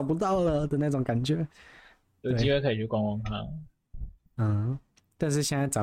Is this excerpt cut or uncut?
uncut